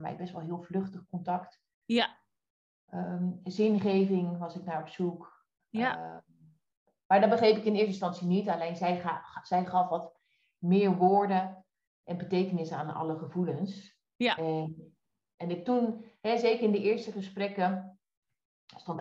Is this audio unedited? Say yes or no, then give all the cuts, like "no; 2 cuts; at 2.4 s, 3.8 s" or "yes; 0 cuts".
yes; 0 cuts